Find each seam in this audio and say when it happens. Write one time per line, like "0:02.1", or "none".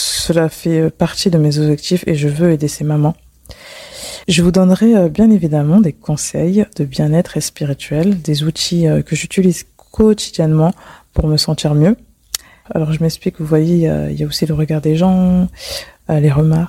0:04.2
0:12.6